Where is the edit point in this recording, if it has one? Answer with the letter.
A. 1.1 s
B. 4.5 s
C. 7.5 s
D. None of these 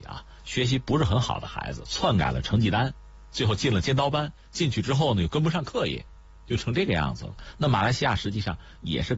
D